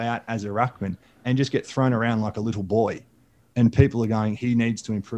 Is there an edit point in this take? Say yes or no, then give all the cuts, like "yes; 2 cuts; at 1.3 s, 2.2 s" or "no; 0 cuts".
no; 0 cuts